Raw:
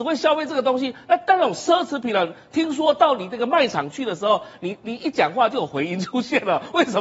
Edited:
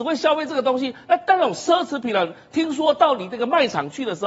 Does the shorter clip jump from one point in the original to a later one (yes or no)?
no